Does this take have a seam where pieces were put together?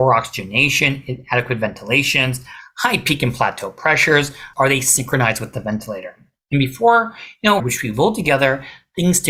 yes; 2 cuts; at 4.5 s, 7.6 s

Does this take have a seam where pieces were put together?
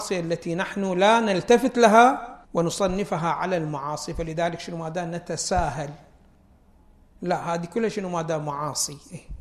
yes; 1 cut; at 2.4 s

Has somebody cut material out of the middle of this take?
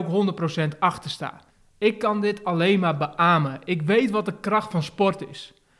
no; 0 cuts

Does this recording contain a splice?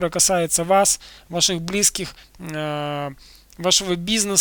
yes; 1 cut; at 2.2 s

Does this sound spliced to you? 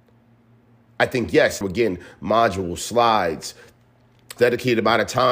yes; 2 cuts; at 1.6 s, 4.4 s

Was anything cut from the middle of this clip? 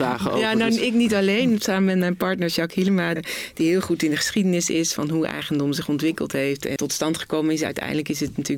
yes; 2 cuts; at 3.2 s, 6.8 s

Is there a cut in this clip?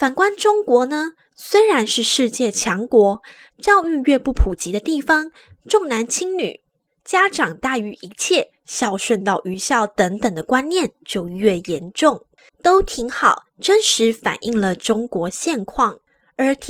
yes; 2 cuts; at 3.5 s, 12.5 s

